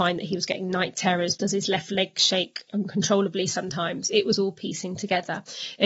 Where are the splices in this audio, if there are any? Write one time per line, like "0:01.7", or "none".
0:01.4